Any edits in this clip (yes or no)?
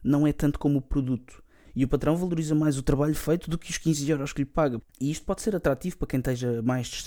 yes